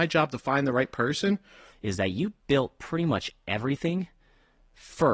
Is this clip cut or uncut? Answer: cut